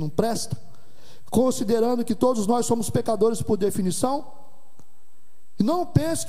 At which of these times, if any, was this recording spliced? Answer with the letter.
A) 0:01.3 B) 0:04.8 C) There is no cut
C